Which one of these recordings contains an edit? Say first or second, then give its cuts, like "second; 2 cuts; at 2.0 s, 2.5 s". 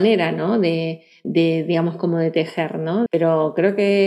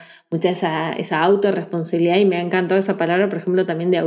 first; 2 cuts; at 1.2 s, 3.1 s